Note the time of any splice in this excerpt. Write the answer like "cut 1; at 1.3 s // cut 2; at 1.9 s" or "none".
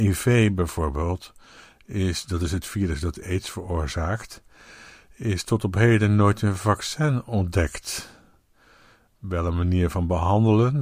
none